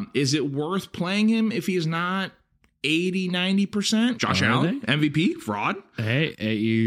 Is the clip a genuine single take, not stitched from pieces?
no; 1 cut; at 4.2 s

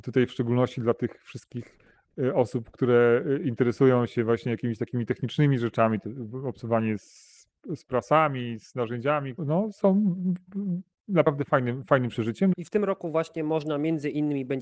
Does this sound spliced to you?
yes; 2 cuts; at 9.4 s, 12.5 s

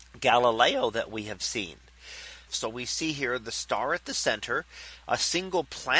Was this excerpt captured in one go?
no; 2 cuts; at 2.5 s, 5.0 s

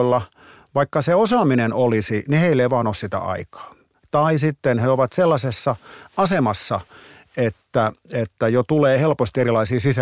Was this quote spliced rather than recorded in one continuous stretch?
no; 0 cuts

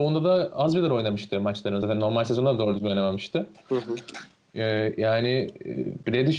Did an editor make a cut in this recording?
no; 0 cuts

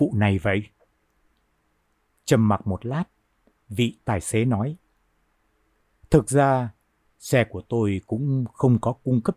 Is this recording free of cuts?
no; 1 cut; at 7.2 s

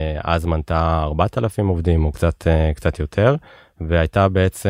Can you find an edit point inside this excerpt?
no; 0 cuts

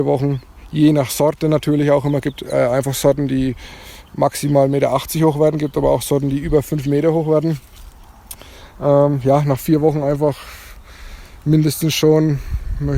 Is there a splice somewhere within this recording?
no; 0 cuts

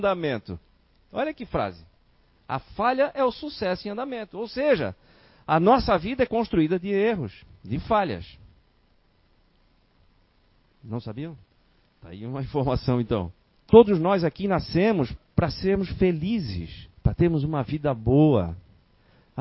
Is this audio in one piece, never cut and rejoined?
no; 2 cuts; at 13.6 s, 17.0 s

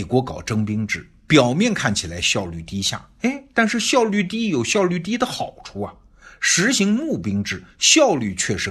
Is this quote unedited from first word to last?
yes; 0 cuts

